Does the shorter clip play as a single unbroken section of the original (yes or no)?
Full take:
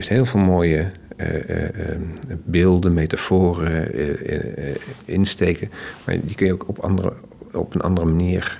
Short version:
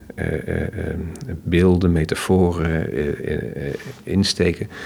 yes